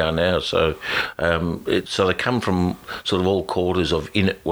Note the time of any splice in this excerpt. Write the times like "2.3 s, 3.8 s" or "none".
none